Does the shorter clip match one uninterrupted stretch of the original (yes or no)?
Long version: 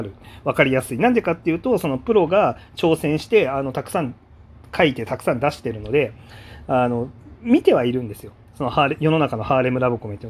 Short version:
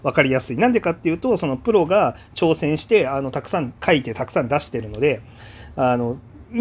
no